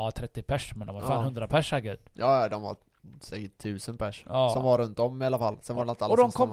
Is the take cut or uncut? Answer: uncut